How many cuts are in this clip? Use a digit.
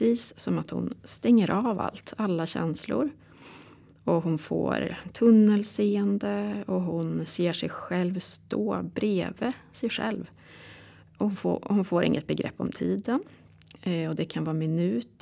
0